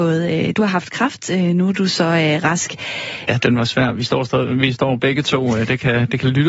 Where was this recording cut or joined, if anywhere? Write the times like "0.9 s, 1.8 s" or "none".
3.3 s